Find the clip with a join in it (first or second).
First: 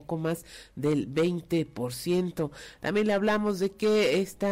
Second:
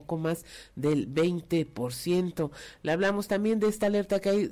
first